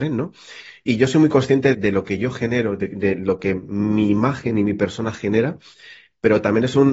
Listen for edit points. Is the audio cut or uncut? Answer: cut